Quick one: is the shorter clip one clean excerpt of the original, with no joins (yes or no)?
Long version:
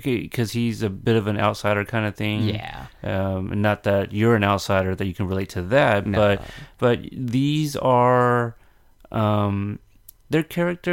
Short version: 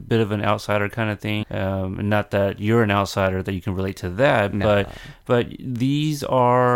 no